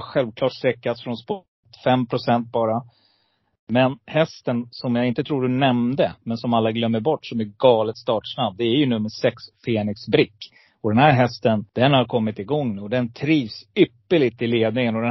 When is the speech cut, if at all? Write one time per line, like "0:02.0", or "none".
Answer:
0:11.7